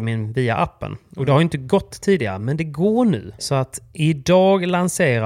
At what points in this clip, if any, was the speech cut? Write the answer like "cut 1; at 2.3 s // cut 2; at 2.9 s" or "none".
cut 1; at 3.4 s